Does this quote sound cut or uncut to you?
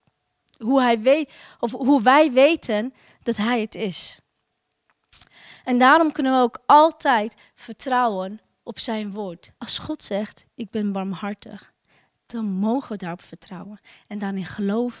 cut